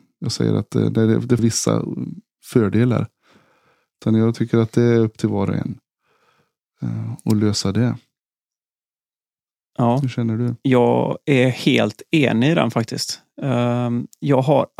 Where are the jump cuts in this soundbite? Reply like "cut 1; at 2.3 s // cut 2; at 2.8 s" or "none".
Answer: cut 1; at 1.4 s